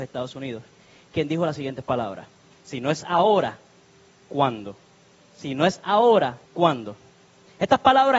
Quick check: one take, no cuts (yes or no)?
no